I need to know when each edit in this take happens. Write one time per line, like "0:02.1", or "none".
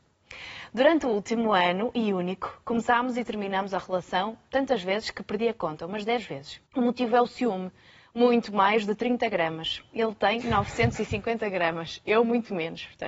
0:06.7